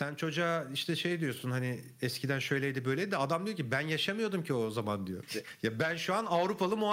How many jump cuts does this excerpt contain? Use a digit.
1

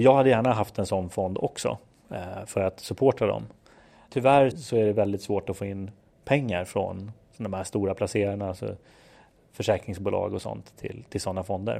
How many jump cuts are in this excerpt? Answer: 1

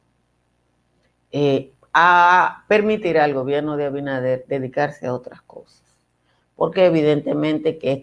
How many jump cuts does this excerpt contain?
0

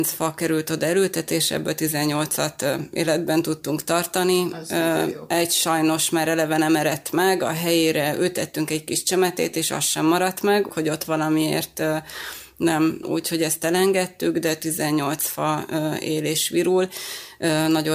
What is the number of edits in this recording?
2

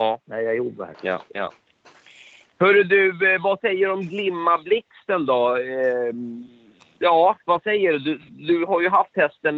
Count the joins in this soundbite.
1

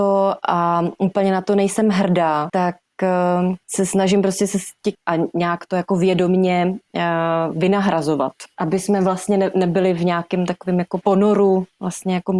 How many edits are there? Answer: 1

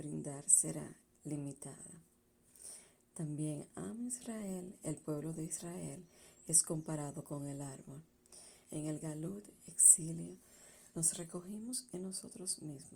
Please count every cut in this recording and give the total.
1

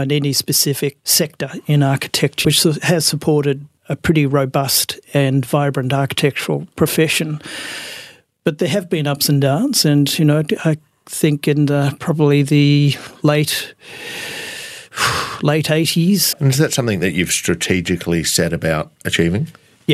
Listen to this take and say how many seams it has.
2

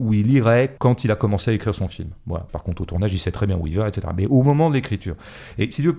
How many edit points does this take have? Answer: 1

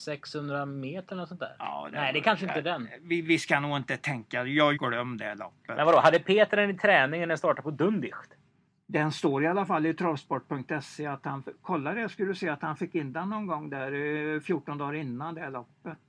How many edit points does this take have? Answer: 1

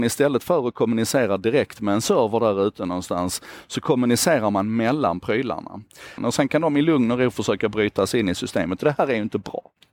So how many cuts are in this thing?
1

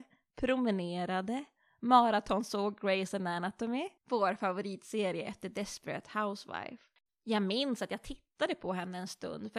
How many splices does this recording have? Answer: 2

